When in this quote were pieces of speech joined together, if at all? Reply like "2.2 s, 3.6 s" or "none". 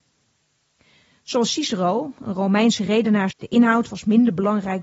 3.3 s